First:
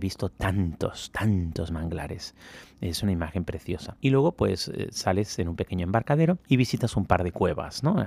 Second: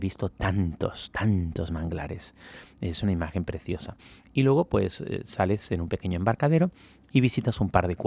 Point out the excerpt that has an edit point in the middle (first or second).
first